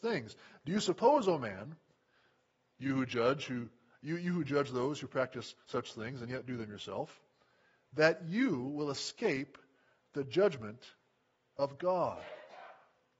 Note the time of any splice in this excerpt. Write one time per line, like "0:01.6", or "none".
none